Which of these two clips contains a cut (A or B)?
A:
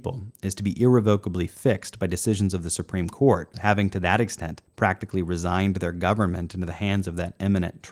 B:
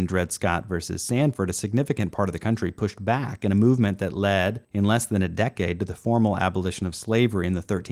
A